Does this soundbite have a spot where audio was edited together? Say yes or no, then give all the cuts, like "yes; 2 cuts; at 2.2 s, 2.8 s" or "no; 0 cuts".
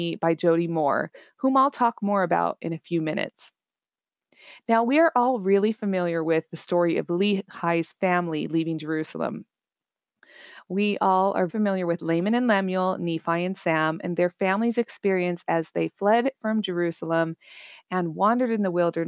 yes; 1 cut; at 11.5 s